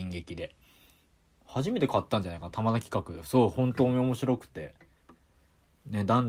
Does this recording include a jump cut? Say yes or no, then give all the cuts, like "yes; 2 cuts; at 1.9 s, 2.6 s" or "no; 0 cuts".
no; 0 cuts